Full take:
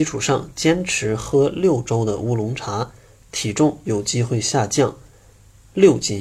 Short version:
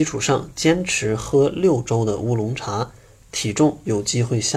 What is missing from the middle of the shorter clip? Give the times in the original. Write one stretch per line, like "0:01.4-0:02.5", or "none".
none